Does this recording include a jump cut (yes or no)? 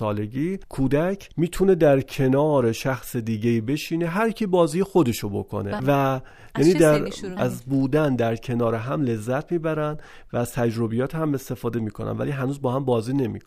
yes